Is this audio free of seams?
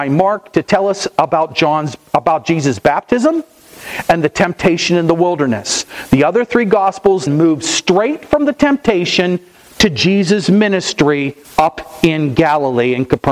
no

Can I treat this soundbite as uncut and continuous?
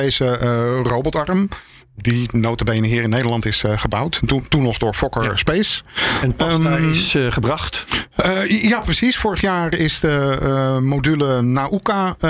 yes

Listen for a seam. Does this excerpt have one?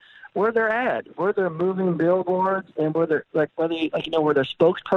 yes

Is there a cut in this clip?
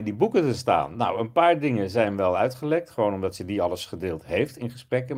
no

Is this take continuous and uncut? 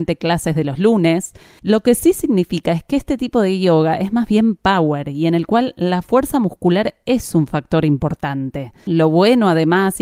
no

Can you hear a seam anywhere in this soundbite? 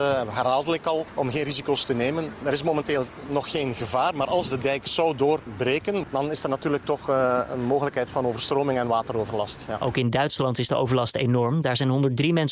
no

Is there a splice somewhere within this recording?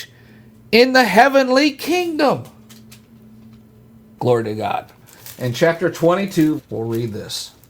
yes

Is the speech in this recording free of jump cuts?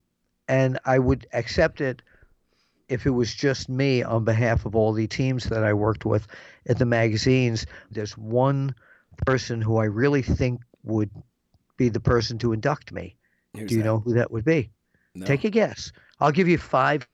no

